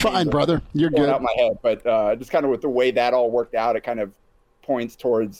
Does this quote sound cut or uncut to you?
uncut